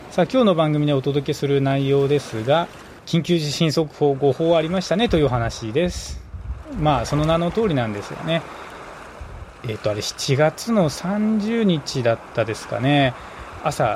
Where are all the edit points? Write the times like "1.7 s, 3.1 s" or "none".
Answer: 3.0 s